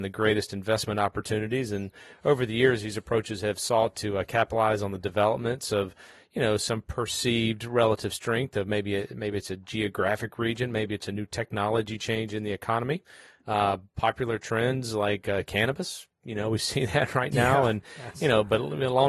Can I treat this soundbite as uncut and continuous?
yes; 0 cuts

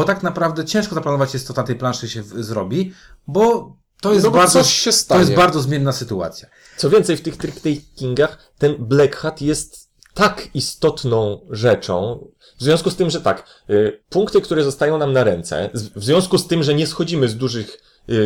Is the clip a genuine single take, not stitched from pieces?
no; 1 cut; at 14.0 s

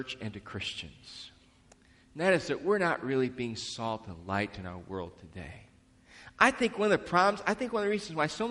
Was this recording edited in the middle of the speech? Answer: no; 0 cuts

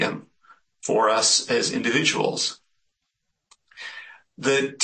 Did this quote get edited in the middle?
no; 0 cuts

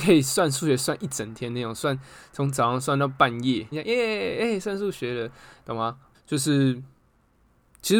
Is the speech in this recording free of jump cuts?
no; 2 cuts; at 3.7 s, 6.1 s

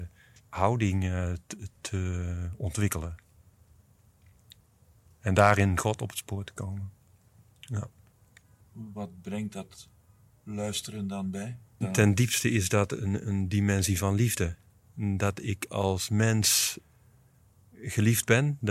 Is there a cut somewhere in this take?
yes; 1 cut; at 11.8 s

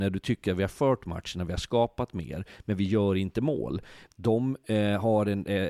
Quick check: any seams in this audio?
yes; 1 cut; at 4.1 s

